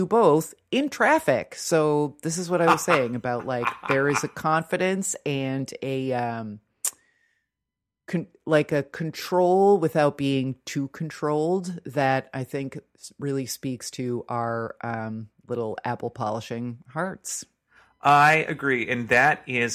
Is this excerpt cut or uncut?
uncut